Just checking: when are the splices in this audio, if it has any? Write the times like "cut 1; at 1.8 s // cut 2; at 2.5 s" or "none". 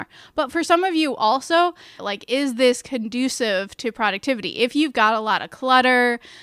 cut 1; at 2.0 s